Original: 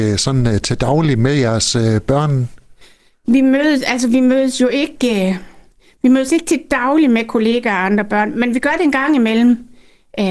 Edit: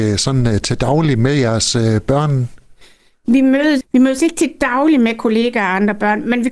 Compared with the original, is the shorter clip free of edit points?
no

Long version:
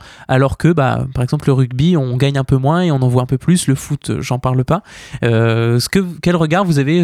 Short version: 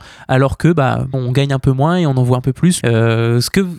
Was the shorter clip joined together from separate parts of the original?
yes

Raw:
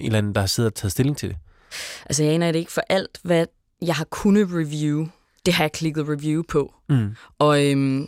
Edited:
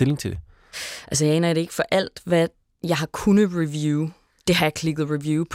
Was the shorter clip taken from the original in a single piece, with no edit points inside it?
yes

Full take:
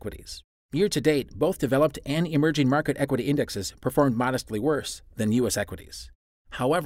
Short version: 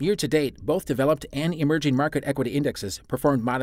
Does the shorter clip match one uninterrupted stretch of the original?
yes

